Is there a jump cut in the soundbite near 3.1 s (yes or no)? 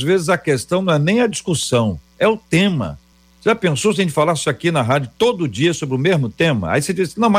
no